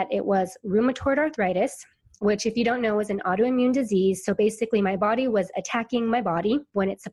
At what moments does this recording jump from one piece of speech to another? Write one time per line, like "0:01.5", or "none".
none